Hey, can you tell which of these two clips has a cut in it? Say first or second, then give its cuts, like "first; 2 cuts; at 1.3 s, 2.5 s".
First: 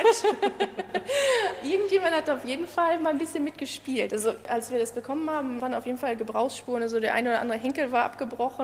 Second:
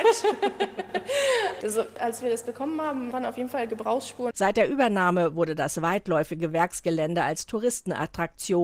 second; 2 cuts; at 1.6 s, 4.3 s